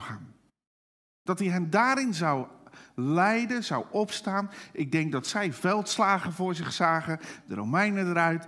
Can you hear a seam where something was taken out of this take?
yes; 1 cut; at 7.4 s

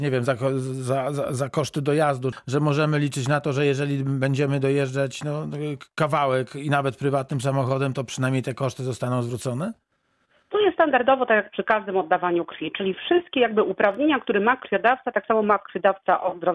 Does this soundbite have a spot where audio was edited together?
yes; 1 cut; at 2.3 s

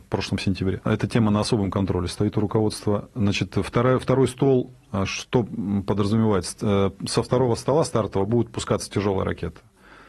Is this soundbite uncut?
yes; 0 cuts

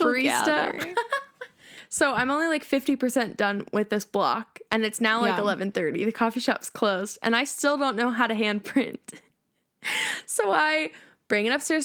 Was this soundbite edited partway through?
no; 0 cuts

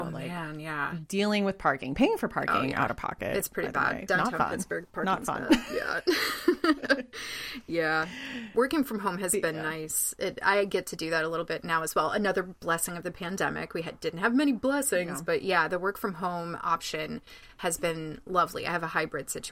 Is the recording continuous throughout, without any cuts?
yes; 0 cuts

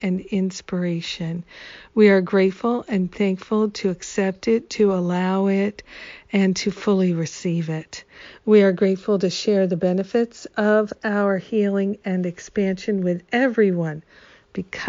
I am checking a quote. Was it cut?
no; 0 cuts

